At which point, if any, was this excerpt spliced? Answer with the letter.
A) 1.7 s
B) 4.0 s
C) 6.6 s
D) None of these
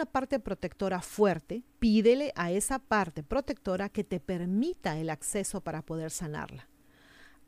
A